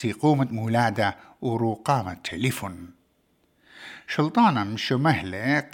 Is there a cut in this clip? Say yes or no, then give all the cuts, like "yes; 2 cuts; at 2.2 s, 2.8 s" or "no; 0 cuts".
no; 0 cuts